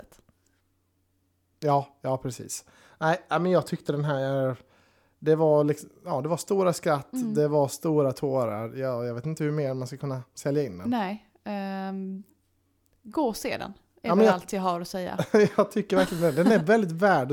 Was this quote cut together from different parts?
no; 0 cuts

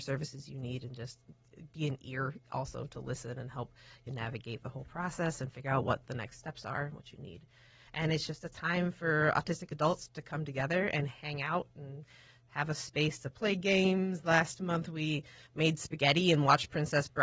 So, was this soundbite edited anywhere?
yes; 1 cut; at 7.9 s

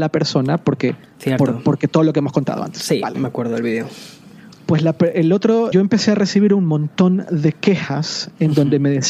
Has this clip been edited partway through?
yes; 2 cuts; at 4.5 s, 5.7 s

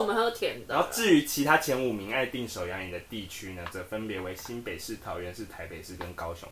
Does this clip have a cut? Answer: no; 0 cuts

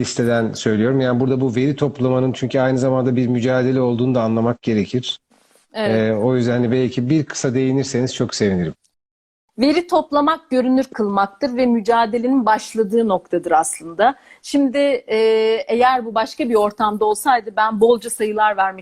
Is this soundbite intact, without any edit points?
yes; 0 cuts

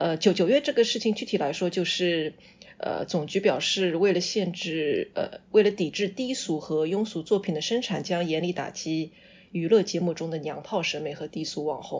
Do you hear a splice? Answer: no; 0 cuts

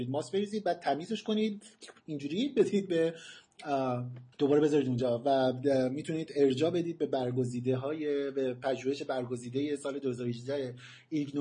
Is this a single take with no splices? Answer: no; 1 cut; at 4.3 s

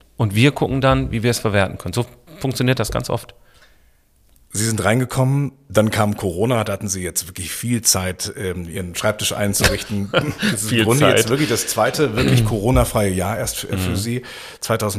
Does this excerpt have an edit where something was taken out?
no; 0 cuts

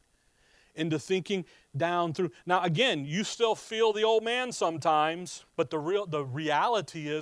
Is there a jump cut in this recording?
yes; 1 cut; at 5.5 s

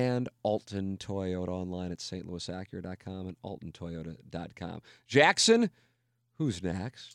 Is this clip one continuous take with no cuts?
yes; 0 cuts

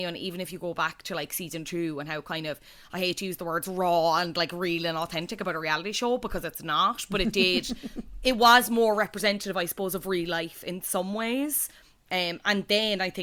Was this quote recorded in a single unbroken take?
yes; 0 cuts

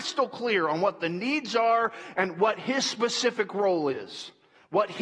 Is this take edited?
no; 0 cuts

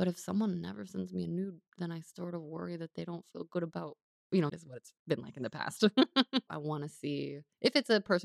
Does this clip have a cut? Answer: yes; 2 cuts; at 4.5 s, 6.5 s

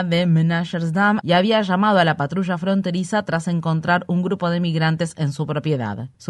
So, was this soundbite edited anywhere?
yes; 1 cut; at 1.2 s

